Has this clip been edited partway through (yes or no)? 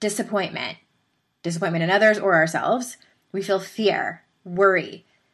no